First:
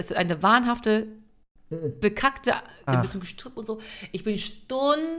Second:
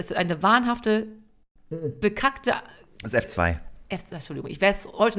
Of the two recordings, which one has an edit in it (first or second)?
first